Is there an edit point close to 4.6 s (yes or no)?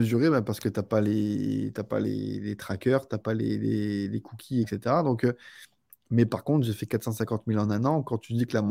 yes